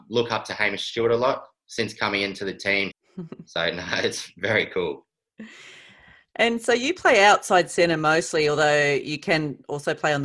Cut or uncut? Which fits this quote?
cut